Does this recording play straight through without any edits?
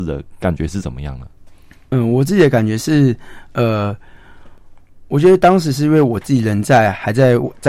yes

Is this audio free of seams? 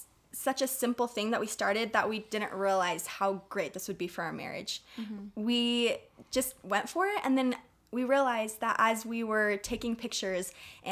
yes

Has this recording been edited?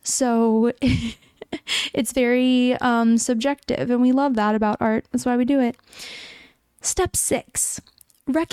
no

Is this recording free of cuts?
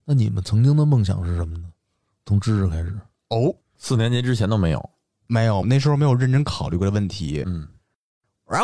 no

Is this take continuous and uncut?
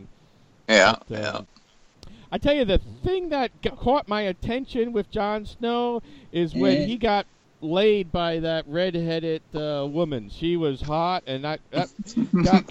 yes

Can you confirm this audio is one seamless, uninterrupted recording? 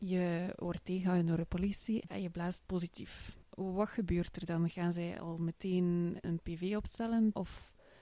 yes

